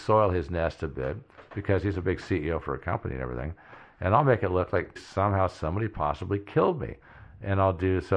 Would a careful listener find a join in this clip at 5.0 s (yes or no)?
yes